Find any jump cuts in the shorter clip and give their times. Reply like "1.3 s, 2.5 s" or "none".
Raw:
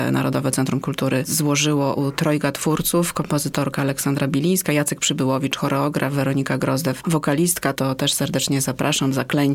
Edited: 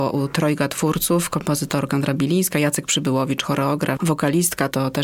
1.9 s, 4.0 s